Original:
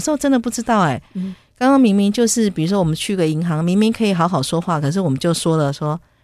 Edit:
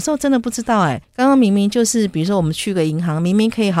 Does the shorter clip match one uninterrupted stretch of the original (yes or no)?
no